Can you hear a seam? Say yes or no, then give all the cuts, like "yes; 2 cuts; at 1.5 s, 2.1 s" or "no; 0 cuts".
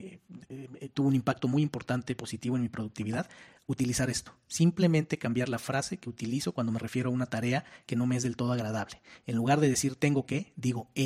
no; 0 cuts